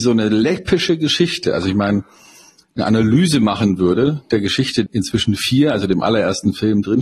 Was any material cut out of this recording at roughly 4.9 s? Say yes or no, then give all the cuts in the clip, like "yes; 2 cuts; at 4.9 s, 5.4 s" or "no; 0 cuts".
yes; 2 cuts; at 2.6 s, 4.9 s